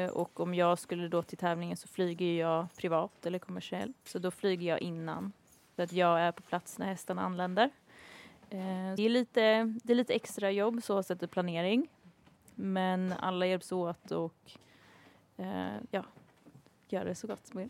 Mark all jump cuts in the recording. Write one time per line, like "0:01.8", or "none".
0:09.0